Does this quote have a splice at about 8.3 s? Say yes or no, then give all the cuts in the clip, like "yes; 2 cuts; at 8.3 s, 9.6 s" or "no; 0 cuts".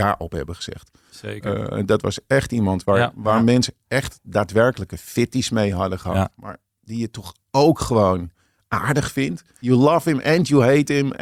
no; 2 cuts; at 1.1 s, 9.6 s